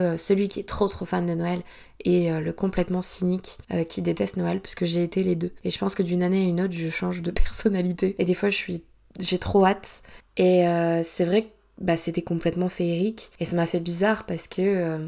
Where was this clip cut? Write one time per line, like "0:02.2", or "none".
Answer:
0:10.2